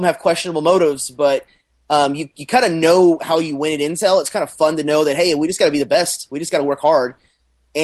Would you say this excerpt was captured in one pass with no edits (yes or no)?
yes